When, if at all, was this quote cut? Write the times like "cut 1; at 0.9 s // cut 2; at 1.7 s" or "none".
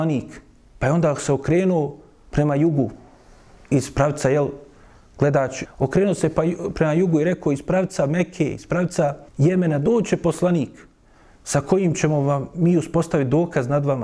cut 1; at 5.7 s // cut 2; at 9.3 s

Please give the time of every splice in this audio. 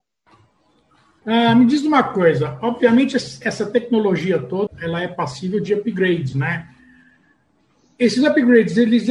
cut 1; at 1.2 s // cut 2; at 4.7 s // cut 3; at 6.3 s

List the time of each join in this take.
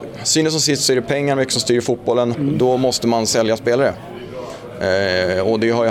cut 1; at 2.3 s

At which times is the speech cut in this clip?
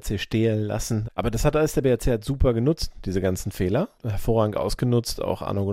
cut 1; at 1.0 s

